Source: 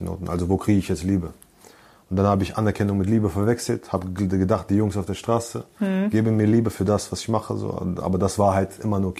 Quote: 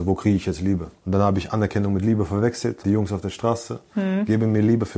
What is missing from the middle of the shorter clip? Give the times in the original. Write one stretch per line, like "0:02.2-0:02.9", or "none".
0:01.4-0:02.0
0:03.9-0:04.7

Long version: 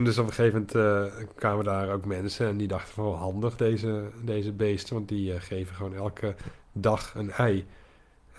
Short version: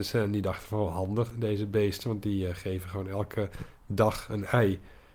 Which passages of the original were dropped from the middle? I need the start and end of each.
0:03.6-0:04.2

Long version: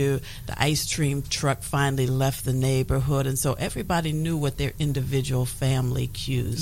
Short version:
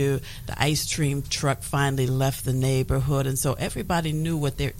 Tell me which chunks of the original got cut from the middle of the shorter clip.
none

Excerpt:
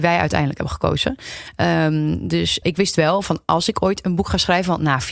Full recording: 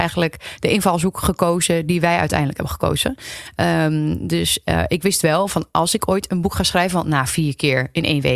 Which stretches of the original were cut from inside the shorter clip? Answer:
0:04.6-0:04.9

